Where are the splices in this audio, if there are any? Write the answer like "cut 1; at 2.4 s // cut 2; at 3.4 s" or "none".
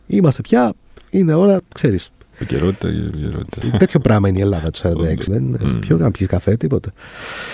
cut 1; at 3.6 s // cut 2; at 5.3 s

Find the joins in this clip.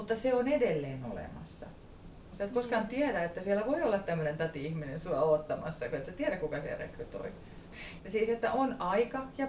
cut 1; at 2.3 s // cut 2; at 8.0 s

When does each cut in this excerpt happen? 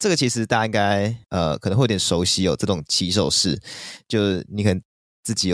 cut 1; at 1.2 s

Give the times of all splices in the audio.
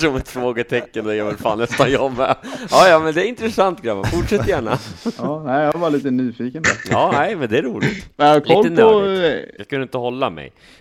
cut 1; at 8.1 s // cut 2; at 9.6 s

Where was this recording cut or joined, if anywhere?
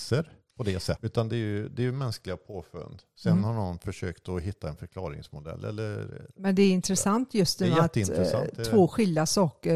cut 1; at 1.0 s

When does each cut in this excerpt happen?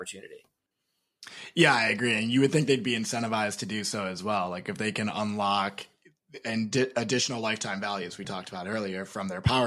none

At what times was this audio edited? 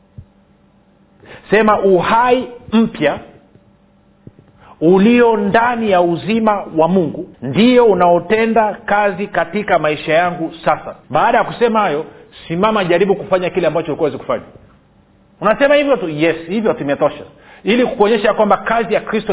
cut 1; at 7.3 s // cut 2; at 11.0 s

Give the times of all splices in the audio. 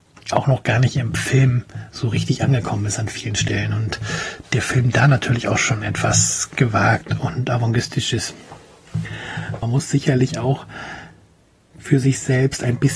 cut 1; at 9.6 s

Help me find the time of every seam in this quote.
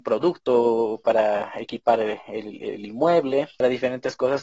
none

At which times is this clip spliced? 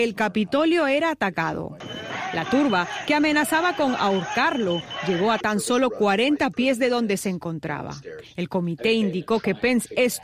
none

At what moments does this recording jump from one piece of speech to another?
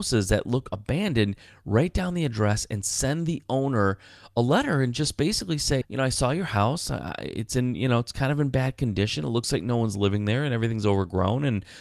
cut 1; at 5.8 s

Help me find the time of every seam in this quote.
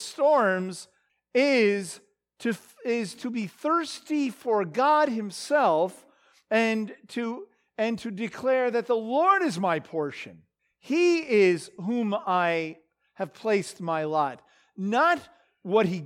none

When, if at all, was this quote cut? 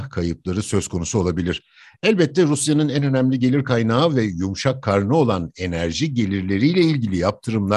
none

